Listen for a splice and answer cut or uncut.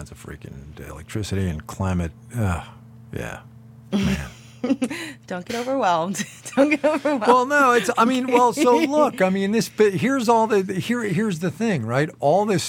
uncut